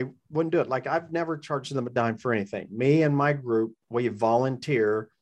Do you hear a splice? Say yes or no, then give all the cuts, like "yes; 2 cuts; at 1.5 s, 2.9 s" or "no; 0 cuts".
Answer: no; 0 cuts